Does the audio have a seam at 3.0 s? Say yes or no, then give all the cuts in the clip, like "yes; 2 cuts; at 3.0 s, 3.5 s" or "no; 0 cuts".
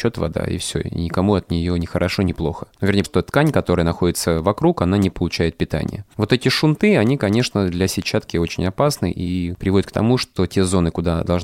yes; 1 cut; at 3.0 s